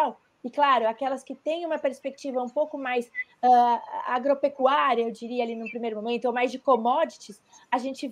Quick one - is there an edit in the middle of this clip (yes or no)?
no